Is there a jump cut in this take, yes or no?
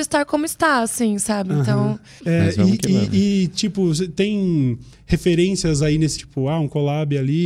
yes